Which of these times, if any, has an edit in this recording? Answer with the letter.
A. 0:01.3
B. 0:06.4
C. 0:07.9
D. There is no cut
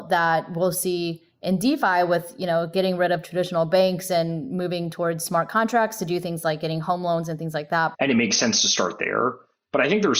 C